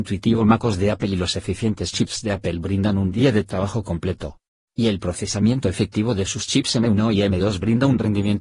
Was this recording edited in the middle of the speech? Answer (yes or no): no